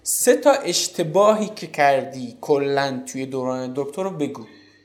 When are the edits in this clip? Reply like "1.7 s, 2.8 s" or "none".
3.7 s